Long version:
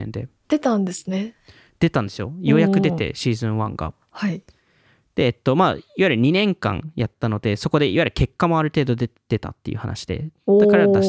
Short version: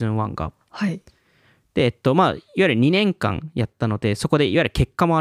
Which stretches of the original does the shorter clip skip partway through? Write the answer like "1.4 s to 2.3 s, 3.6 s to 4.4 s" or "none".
none